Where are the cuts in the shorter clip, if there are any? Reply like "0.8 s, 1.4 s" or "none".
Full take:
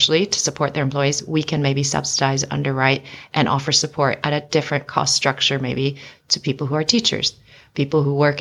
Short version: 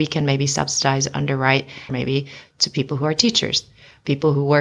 1.9 s